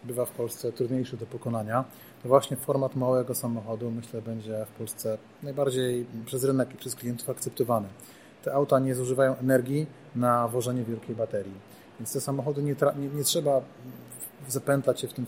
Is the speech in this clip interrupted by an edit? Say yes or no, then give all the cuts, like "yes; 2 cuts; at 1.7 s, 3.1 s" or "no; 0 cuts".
no; 0 cuts